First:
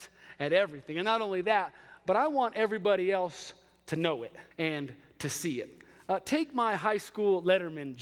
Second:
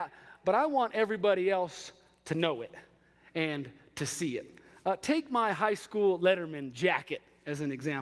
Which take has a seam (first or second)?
first